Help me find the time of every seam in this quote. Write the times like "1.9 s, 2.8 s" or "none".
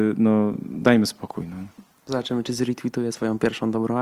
none